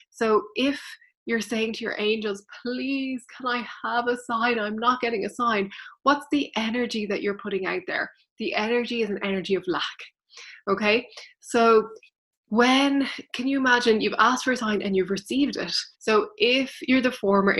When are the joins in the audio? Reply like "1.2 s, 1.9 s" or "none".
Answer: 15.9 s